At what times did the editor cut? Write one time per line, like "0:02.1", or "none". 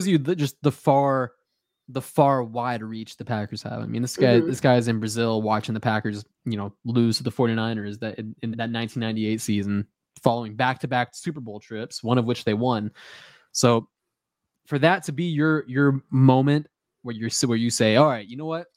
0:08.5